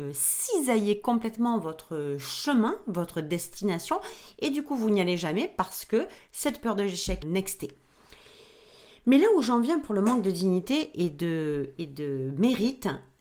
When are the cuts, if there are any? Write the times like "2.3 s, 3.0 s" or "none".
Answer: 7.2 s